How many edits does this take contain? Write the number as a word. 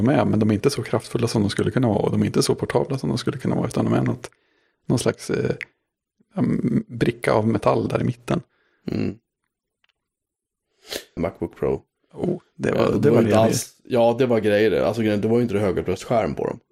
one